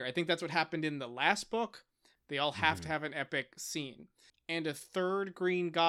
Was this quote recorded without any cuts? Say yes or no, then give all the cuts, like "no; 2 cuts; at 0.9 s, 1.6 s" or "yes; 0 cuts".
no; 2 cuts; at 2.2 s, 4.3 s